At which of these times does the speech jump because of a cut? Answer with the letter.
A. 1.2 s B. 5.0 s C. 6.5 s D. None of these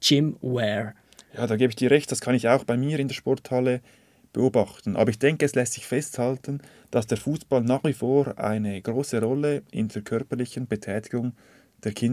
D